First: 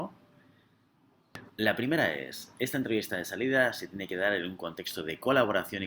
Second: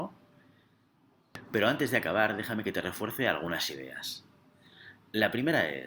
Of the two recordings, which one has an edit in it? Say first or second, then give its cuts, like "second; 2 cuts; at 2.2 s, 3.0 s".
first; 1 cut; at 1.5 s